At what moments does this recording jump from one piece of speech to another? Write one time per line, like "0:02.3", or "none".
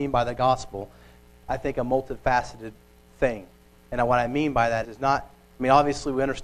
0:01.4
0:04.8